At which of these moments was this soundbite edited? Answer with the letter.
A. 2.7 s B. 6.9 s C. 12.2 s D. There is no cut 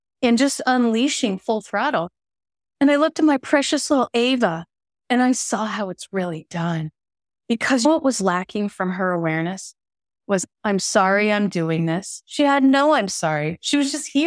D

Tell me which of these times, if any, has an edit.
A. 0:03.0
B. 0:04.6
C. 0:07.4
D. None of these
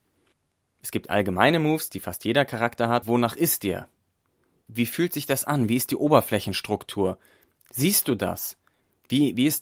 A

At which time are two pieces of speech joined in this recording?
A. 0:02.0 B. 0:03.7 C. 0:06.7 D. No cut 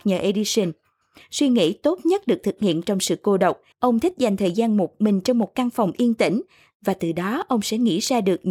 B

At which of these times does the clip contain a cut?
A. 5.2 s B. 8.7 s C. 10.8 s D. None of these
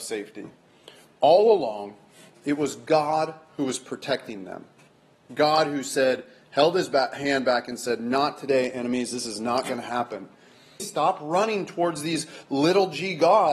C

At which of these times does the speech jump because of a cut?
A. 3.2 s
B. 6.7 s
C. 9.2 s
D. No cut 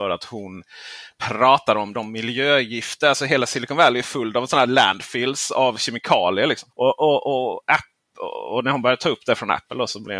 B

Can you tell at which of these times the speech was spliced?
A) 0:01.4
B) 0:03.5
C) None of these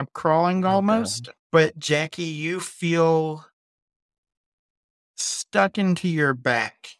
A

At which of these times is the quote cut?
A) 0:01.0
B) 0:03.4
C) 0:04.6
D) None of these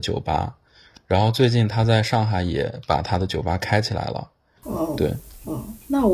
C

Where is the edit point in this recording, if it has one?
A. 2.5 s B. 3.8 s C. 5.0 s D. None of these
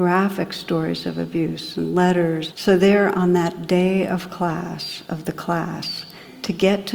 A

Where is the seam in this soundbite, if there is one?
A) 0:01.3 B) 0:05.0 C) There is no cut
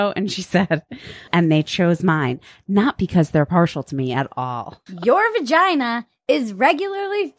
A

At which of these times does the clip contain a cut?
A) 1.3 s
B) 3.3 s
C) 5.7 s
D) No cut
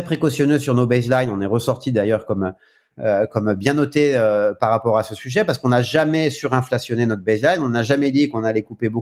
D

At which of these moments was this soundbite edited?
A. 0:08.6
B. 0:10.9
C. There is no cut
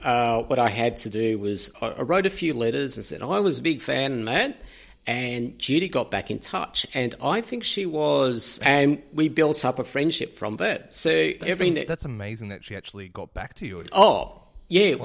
A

